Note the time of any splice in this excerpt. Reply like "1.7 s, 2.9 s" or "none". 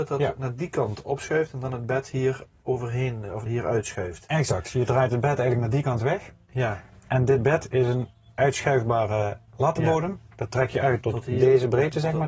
3.5 s, 11.0 s